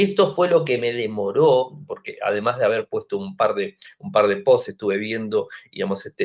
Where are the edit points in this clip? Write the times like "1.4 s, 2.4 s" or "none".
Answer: none